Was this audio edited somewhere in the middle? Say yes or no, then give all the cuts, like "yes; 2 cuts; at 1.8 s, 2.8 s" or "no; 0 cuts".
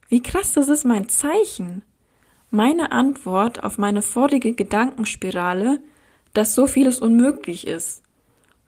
no; 0 cuts